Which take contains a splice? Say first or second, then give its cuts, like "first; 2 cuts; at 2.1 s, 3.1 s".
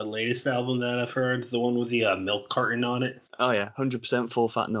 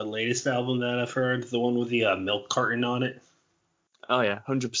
first; 1 cut; at 3.3 s